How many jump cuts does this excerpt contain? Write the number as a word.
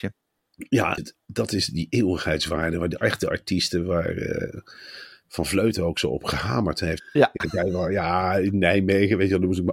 two